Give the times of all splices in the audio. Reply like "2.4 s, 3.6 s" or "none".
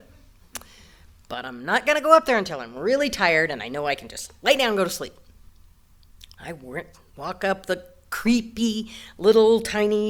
6.4 s